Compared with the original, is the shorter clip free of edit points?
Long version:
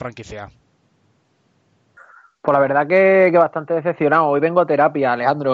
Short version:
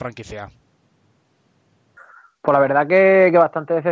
yes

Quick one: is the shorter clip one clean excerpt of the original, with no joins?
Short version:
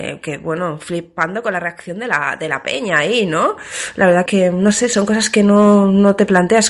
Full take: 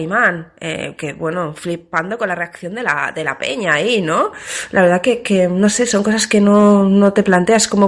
no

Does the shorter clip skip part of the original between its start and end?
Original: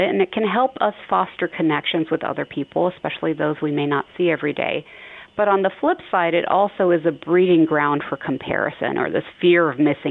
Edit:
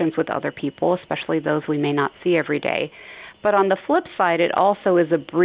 no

